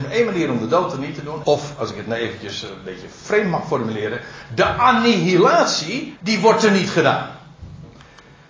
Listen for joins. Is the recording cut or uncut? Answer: cut